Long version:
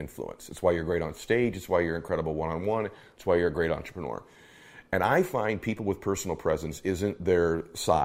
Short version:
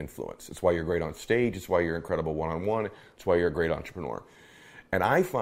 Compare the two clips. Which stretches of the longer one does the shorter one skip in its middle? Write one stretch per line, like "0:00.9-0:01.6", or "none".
none